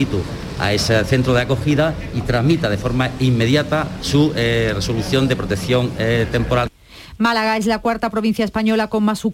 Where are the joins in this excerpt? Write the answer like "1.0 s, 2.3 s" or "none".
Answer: none